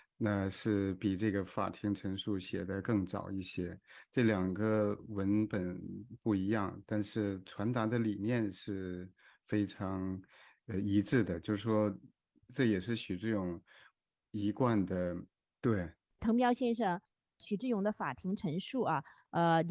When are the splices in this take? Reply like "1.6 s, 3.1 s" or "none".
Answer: 15.5 s